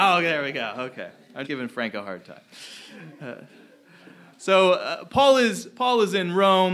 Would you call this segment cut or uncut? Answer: cut